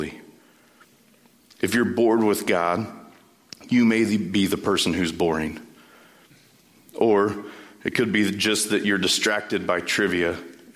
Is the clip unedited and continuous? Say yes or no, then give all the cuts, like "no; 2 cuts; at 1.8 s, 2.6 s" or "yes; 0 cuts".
yes; 0 cuts